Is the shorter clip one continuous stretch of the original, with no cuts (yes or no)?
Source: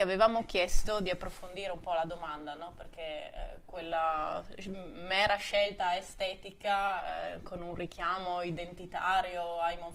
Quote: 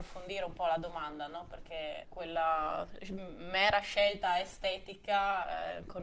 no